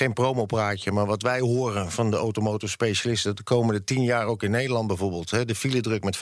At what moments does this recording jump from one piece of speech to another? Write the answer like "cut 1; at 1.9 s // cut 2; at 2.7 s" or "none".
none